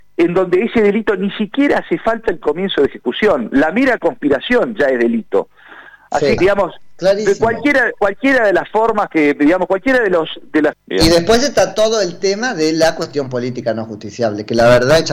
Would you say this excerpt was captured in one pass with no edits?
no; 2 cuts; at 6.4 s, 10.7 s

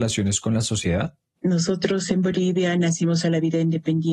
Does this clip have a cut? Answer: yes; 1 cut; at 1.4 s

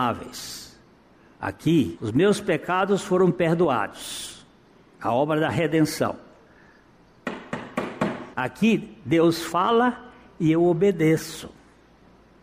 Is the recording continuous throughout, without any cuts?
no; 2 cuts; at 2.0 s, 8.3 s

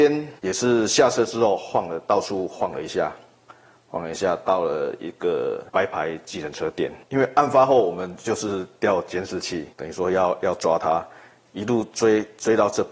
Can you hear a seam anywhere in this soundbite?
no; 0 cuts

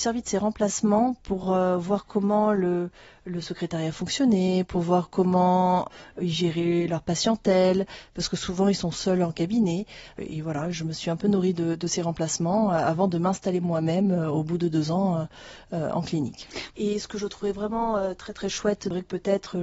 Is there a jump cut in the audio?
no; 0 cuts

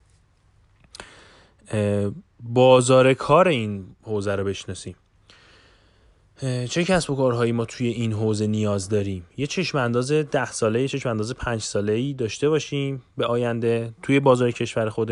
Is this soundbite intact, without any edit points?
yes; 0 cuts

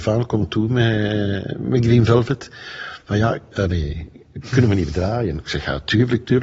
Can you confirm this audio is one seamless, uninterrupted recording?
no; 1 cut; at 3.5 s

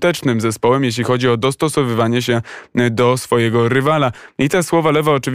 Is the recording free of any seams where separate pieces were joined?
yes; 0 cuts

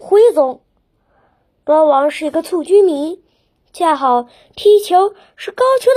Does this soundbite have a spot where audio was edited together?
no; 0 cuts

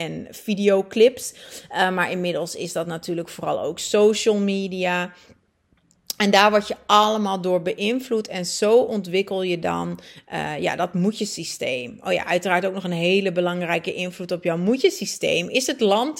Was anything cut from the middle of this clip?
no; 0 cuts

